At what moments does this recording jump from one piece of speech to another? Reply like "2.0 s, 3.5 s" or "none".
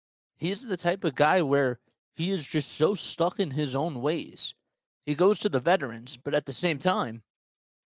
5.0 s